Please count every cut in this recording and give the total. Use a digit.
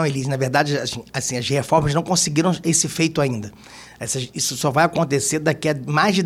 0